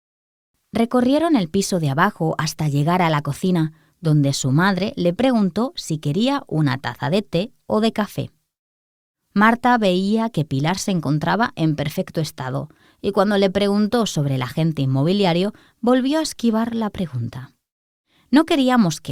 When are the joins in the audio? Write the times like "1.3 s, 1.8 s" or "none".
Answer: none